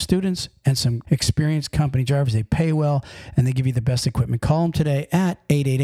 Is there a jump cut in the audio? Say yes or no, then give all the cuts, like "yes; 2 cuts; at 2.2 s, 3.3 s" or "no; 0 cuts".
yes; 1 cut; at 1.0 s